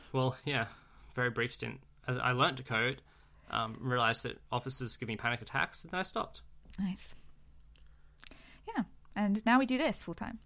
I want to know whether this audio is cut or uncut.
uncut